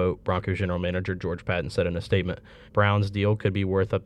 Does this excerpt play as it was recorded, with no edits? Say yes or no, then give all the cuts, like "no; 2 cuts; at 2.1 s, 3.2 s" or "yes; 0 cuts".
no; 1 cut; at 2.7 s